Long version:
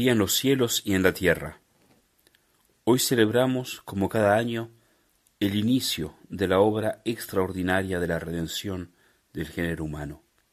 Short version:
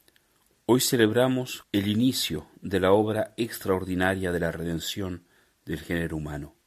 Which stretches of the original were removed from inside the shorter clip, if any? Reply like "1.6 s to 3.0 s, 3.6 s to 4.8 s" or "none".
3.8 s to 5.3 s